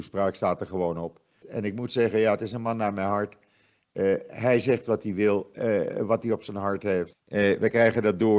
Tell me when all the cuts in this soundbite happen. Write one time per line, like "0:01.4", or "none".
0:01.4
0:07.1